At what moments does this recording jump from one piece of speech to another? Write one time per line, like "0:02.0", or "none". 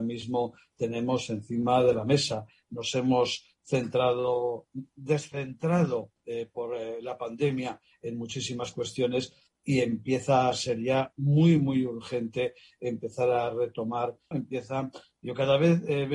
0:14.3